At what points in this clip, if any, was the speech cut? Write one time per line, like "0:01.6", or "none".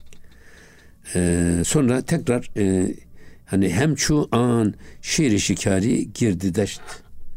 none